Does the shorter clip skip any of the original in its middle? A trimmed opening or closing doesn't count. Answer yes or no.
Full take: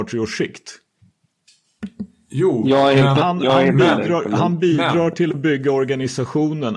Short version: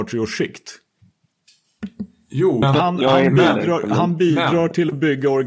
yes